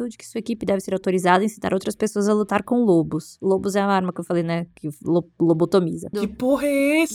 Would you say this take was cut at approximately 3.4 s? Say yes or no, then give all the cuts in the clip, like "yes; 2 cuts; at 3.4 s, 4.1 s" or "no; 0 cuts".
no; 1 cut; at 6.1 s